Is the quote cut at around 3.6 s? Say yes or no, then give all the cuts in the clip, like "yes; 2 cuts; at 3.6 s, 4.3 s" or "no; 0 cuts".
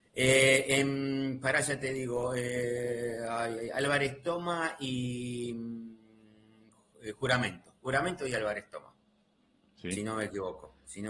yes; 1 cut; at 3.6 s